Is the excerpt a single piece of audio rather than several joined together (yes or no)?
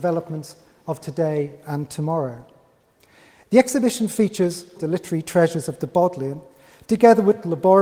no